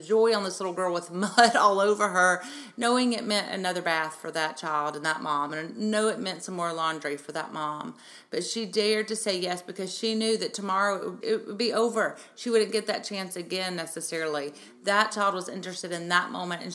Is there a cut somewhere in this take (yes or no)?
yes